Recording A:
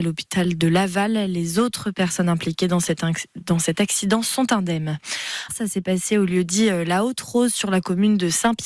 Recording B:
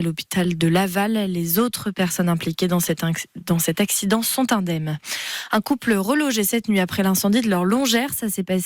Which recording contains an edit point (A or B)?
A